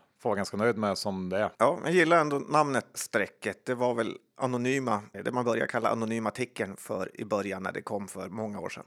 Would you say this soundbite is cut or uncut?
cut